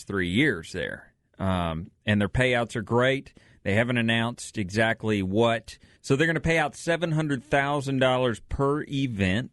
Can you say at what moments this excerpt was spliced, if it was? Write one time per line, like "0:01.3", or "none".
0:06.0